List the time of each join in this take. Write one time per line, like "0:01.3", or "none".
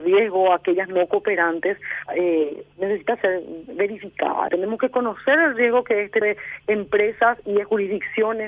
0:02.1
0:04.5
0:06.2